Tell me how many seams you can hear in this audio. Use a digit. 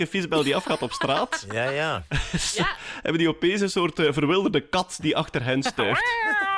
0